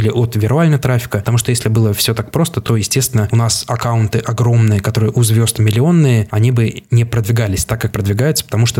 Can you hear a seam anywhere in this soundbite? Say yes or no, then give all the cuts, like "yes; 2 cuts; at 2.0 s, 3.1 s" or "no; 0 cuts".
no; 0 cuts